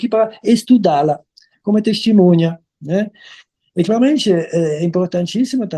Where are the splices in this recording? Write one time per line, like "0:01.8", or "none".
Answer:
none